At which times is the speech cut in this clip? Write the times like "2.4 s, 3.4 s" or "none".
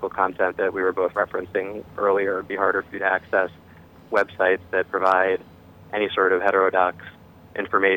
none